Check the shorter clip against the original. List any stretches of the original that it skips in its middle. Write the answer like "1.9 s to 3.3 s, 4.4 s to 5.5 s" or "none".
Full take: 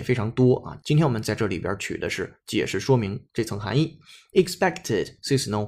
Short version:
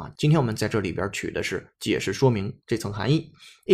none